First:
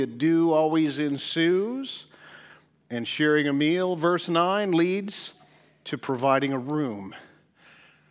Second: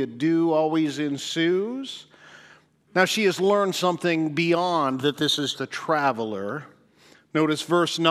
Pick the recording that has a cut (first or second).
second